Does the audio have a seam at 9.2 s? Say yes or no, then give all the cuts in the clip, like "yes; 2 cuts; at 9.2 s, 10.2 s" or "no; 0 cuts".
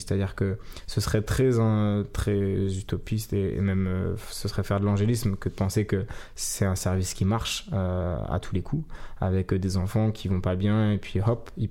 no; 0 cuts